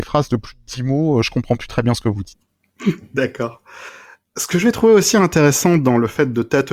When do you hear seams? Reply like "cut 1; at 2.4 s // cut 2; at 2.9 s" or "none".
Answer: none